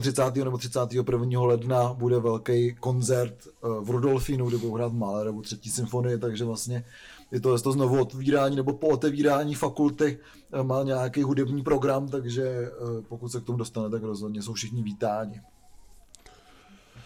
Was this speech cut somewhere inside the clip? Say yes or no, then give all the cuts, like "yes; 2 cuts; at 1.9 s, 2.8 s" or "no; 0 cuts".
no; 0 cuts